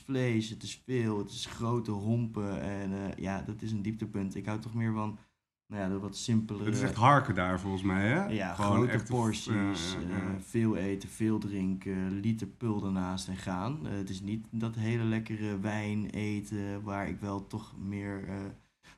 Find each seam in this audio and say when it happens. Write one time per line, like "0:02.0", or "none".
none